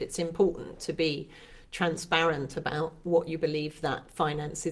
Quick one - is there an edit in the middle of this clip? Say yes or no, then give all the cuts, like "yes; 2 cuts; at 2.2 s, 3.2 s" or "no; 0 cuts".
no; 0 cuts